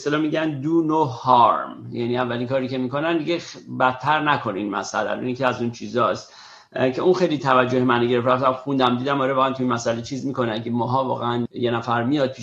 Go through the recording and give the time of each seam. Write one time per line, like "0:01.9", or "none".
0:11.5

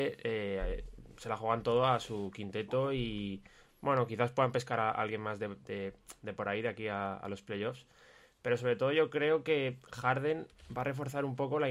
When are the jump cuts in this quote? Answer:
none

